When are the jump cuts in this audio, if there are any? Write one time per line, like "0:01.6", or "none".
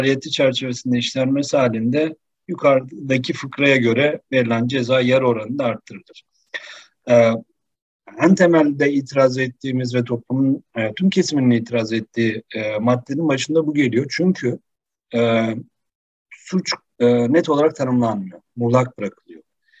none

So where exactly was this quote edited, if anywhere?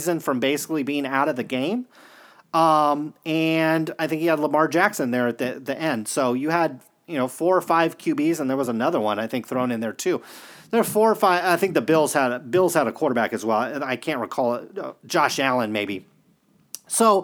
none

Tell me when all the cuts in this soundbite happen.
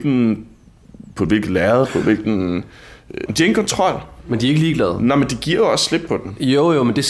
0:03.3

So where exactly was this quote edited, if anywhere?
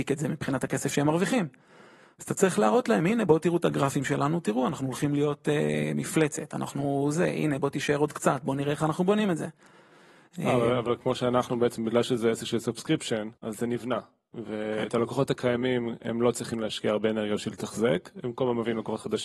0:11.0
0:13.4

